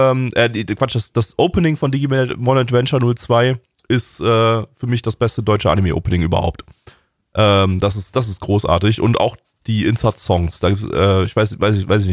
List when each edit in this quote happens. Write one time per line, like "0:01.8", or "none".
none